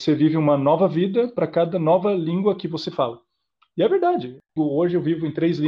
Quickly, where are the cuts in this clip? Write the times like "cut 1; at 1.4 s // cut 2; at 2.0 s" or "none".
cut 1; at 4.6 s